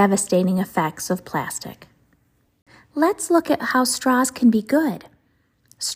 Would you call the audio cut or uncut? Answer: uncut